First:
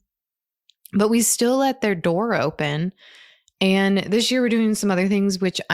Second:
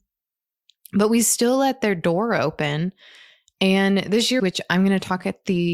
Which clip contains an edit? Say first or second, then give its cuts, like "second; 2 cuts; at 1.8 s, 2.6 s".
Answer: second; 1 cut; at 4.4 s